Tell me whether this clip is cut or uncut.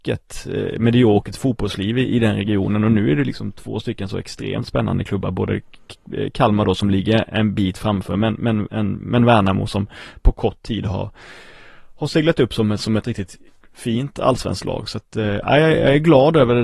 uncut